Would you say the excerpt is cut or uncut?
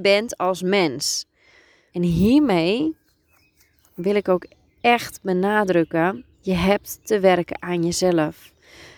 cut